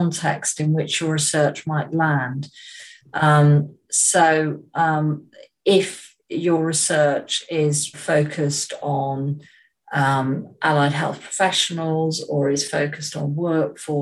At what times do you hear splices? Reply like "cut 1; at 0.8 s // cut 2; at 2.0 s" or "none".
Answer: cut 1; at 7.9 s